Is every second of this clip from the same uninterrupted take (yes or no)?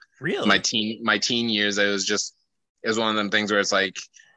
yes